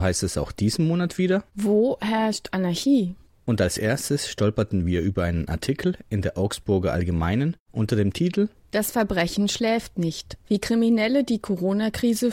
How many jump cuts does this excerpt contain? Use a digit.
1